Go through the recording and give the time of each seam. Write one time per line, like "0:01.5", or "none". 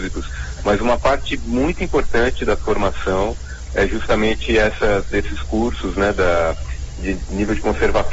none